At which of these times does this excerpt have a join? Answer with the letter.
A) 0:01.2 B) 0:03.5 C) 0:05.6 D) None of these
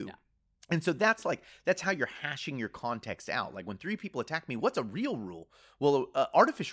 D